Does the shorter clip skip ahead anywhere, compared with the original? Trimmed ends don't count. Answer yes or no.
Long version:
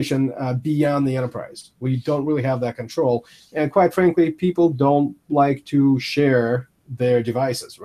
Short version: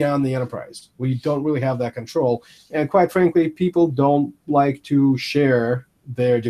no